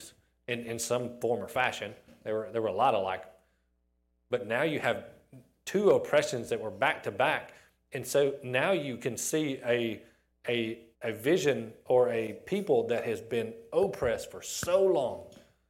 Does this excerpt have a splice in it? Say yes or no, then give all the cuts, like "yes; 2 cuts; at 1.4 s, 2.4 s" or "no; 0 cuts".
yes; 1 cut; at 10.9 s